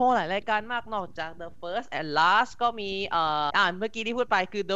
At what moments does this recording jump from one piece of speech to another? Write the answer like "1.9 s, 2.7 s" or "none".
3.5 s